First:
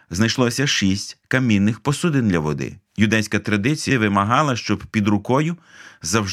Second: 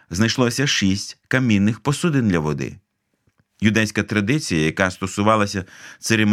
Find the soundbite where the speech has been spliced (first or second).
first